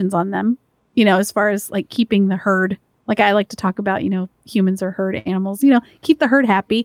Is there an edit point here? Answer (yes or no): no